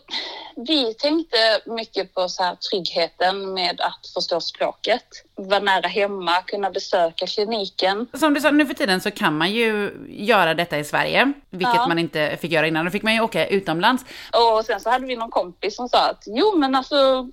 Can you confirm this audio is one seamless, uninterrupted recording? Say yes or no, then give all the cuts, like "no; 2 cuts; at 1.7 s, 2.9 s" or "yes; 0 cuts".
no; 2 cuts; at 8.1 s, 14.3 s